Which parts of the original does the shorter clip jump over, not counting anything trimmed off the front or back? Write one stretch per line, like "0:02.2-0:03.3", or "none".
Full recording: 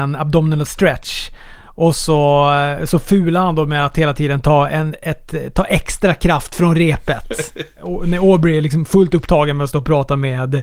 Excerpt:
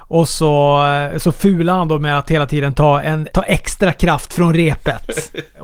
0:05.0-0:05.5